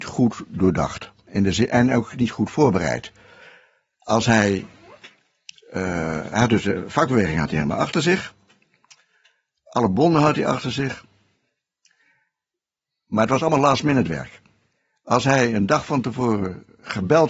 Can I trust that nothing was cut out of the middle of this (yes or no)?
yes